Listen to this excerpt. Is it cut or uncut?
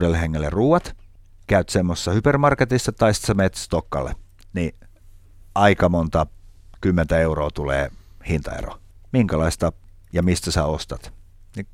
uncut